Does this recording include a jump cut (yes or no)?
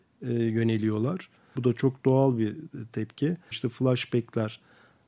yes